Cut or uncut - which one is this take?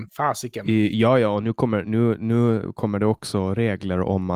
uncut